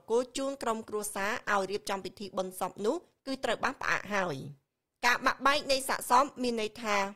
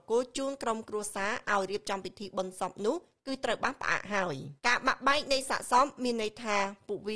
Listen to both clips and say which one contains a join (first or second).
second